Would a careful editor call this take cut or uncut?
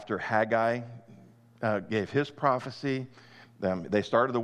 uncut